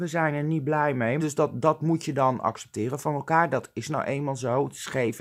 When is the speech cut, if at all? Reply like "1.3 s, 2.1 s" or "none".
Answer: 1.2 s

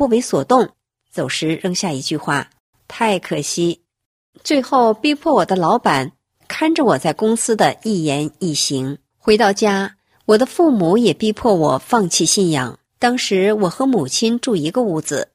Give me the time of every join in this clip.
9.1 s, 12.9 s

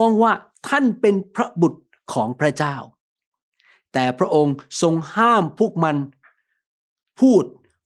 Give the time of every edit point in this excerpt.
none

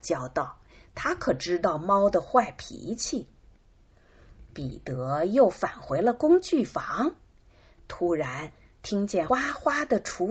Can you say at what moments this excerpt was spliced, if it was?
9.3 s

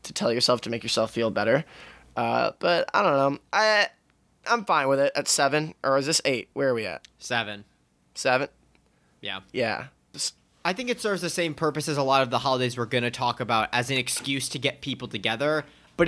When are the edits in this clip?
10.1 s

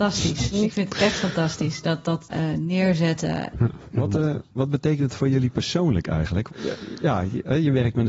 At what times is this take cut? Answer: 2.3 s, 3.5 s, 6.5 s

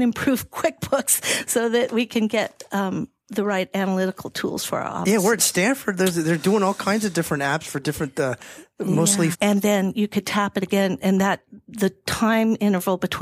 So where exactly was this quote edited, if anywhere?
9.3 s

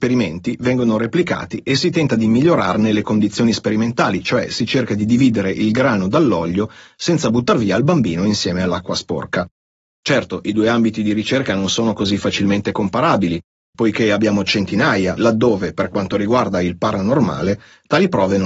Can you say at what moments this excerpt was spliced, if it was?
9.8 s, 13.7 s, 15.2 s

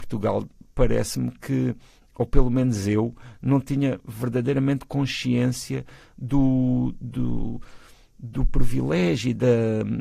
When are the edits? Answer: none

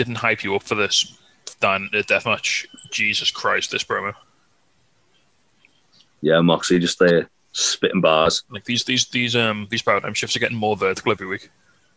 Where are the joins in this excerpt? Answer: 8.5 s

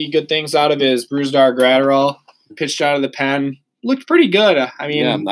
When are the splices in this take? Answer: 2.5 s

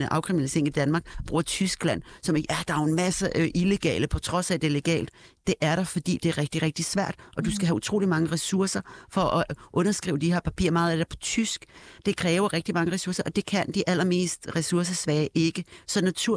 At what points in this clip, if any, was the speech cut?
none

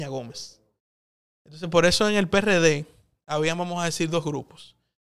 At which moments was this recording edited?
none

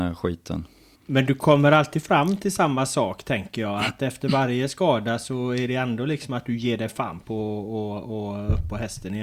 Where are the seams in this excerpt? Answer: 0.9 s

